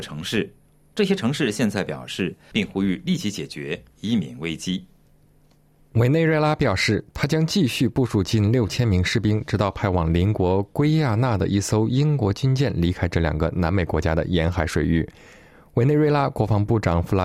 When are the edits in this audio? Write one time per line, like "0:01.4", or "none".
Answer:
0:02.5